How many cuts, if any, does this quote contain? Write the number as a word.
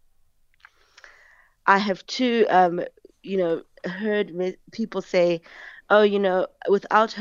one